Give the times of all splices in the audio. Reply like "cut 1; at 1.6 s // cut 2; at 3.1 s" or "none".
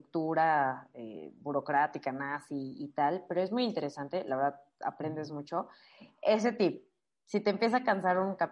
none